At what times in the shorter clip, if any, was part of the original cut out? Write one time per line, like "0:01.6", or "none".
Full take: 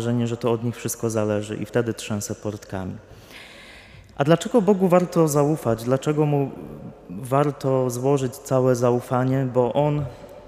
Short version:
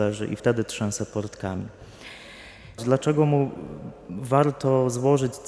0:02.8